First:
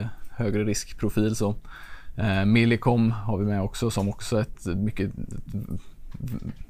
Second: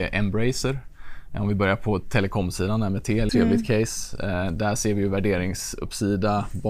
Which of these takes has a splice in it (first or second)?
second